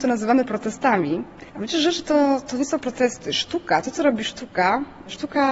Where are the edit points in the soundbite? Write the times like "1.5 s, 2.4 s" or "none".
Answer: 1.5 s